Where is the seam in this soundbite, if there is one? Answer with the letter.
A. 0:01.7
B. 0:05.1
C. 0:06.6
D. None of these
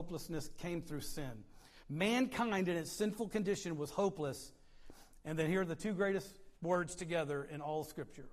C